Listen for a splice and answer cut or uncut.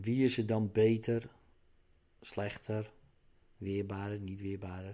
uncut